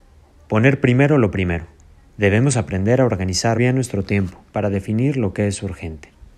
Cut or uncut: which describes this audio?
cut